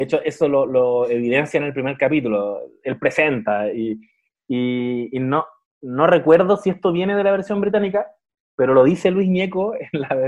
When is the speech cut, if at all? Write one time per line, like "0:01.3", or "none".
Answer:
none